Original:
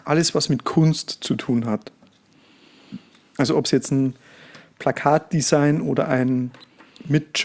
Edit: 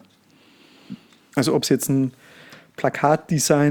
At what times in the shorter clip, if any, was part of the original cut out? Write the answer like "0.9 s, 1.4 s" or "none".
none